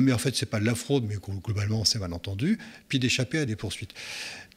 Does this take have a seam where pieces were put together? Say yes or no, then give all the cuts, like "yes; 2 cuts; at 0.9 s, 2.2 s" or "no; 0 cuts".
yes; 1 cut; at 3.5 s